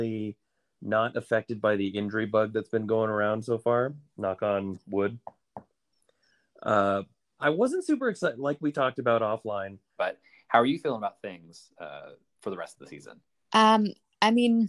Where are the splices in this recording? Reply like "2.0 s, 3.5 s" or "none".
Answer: 7.4 s, 10.0 s